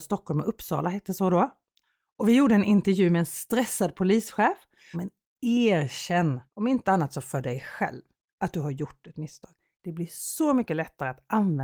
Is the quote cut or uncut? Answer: cut